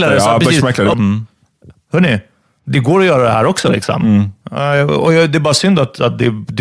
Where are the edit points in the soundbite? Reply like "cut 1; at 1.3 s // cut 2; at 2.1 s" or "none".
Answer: cut 1; at 0.9 s